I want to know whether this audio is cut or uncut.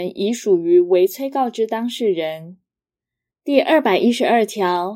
cut